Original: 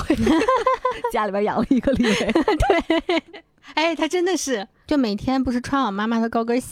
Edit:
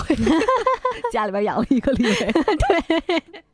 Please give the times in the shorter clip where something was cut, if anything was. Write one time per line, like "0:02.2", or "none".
none